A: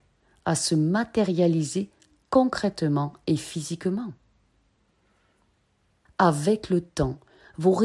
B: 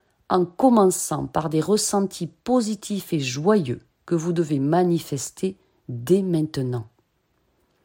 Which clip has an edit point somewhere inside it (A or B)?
A